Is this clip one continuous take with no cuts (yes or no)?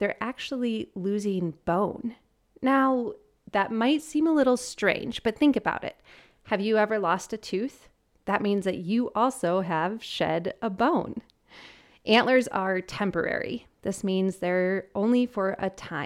yes